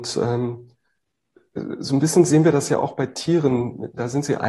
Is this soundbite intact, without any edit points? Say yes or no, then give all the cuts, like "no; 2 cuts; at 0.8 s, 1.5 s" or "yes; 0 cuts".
yes; 0 cuts